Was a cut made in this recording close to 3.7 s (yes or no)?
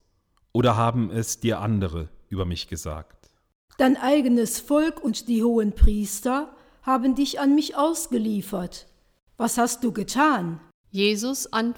yes